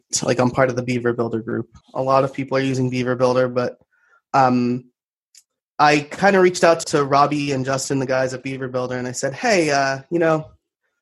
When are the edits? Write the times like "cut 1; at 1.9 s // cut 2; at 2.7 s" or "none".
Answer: cut 1; at 1.8 s // cut 2; at 6.8 s